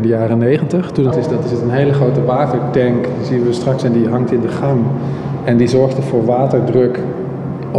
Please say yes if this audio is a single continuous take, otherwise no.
no